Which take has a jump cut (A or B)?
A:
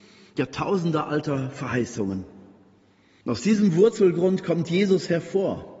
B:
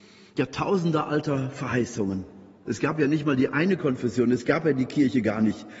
B